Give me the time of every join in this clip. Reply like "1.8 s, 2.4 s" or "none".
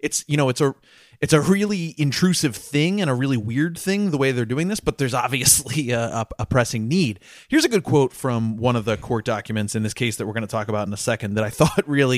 none